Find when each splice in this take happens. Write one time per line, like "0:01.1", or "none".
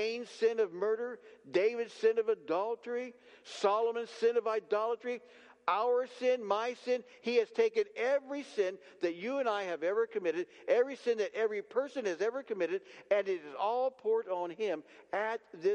none